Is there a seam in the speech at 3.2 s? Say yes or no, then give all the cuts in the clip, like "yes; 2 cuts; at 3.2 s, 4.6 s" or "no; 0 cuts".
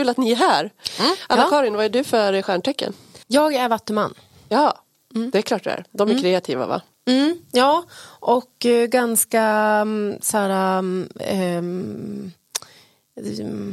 yes; 1 cut; at 3.2 s